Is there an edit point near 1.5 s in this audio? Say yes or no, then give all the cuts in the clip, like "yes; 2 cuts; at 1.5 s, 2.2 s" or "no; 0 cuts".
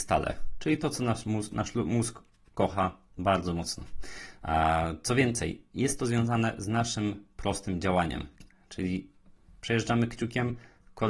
no; 0 cuts